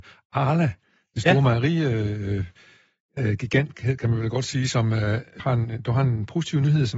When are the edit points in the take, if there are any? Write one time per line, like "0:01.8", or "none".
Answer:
0:05.4